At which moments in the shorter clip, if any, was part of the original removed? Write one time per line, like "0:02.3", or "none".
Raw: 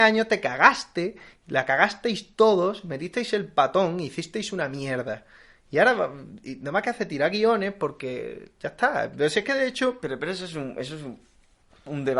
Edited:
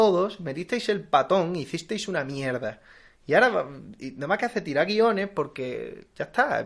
none